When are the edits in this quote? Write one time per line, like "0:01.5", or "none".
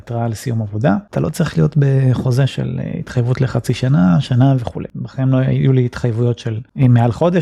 0:01.1
0:04.9